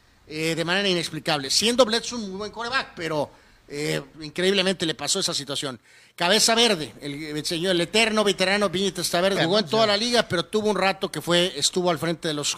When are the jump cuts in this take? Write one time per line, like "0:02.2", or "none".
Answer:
0:04.1
0:09.4

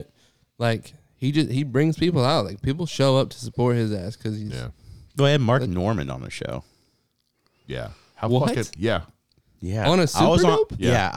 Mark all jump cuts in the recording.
none

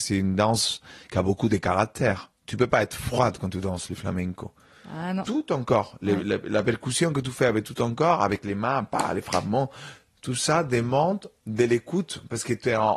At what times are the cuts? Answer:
0:05.3

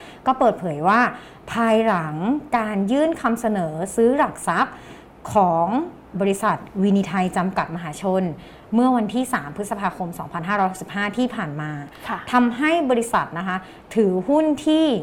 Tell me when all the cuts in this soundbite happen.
0:06.1

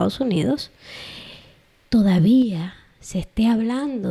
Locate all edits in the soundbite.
none

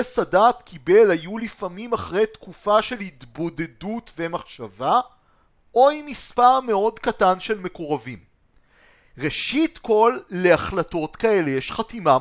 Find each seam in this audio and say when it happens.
0:05.6

